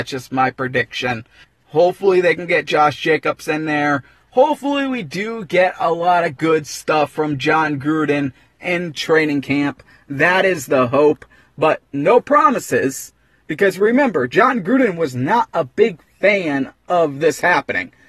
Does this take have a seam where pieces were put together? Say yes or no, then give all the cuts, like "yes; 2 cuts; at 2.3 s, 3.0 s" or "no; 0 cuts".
yes; 1 cut; at 1.4 s